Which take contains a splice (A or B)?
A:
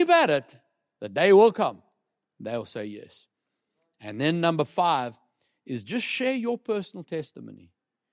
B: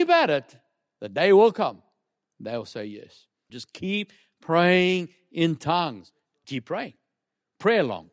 B